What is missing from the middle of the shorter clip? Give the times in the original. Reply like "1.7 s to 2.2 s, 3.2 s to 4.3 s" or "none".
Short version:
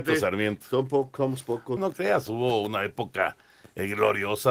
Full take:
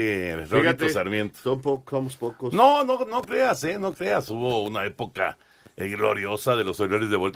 2.5 s to 3.8 s